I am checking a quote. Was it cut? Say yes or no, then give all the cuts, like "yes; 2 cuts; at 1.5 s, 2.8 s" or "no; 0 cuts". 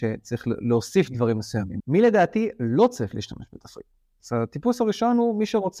yes; 1 cut; at 1.8 s